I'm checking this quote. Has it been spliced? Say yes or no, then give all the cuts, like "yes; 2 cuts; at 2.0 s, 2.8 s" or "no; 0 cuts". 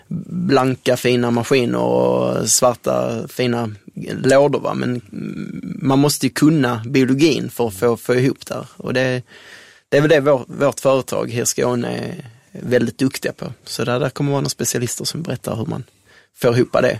no; 0 cuts